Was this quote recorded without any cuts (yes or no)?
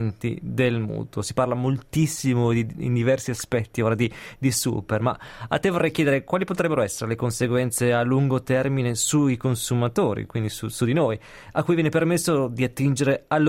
yes